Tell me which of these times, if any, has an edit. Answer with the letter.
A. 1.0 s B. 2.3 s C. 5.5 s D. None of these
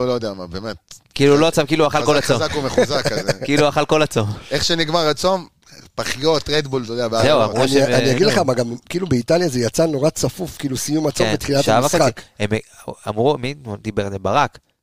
D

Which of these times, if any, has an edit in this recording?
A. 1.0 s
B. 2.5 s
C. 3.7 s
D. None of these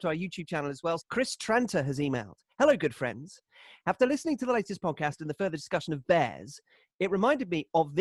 A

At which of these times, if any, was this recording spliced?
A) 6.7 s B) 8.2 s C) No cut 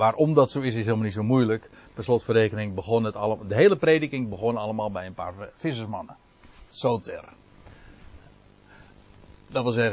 A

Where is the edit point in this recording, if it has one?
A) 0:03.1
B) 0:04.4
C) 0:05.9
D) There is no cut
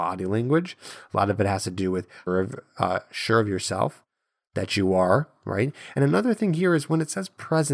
D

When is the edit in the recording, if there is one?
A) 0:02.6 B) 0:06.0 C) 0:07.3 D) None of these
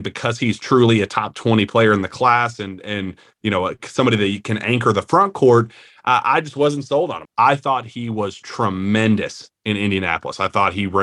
C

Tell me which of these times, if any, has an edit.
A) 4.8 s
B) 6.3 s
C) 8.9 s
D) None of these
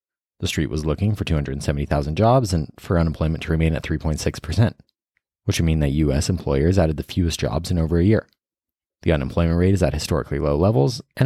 C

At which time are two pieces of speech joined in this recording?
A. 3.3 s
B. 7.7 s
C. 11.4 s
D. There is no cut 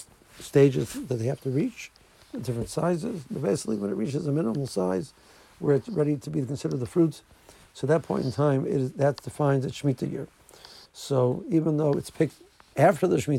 D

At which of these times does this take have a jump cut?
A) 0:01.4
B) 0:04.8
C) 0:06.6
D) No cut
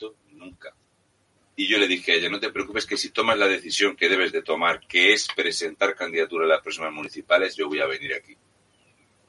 A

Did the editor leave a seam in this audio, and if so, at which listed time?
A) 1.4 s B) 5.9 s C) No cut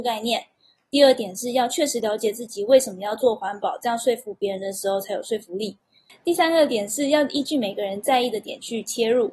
C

